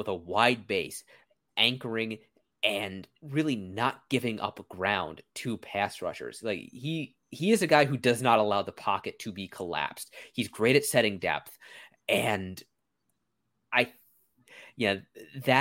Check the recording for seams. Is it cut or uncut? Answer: uncut